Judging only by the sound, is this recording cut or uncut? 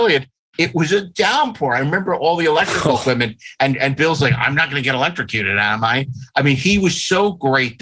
uncut